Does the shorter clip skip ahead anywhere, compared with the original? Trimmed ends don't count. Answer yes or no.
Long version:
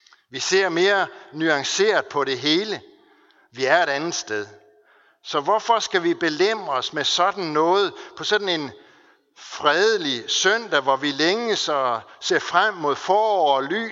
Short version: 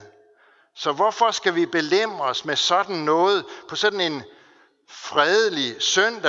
no